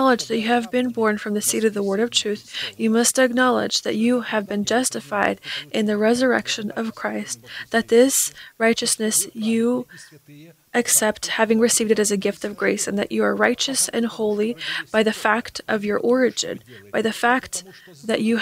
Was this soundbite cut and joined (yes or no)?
no